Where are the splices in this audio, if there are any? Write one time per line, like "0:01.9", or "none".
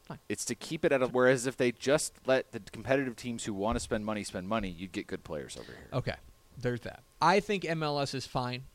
0:01.1
0:07.1